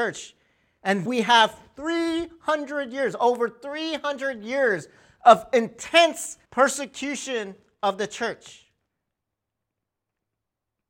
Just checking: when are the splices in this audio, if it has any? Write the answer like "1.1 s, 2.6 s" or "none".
1.1 s, 6.4 s